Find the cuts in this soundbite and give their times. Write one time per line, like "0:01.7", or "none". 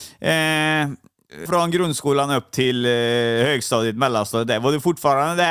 0:01.5